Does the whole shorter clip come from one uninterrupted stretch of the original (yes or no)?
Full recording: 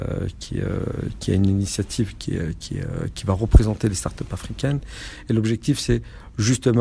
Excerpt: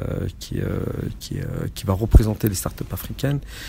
no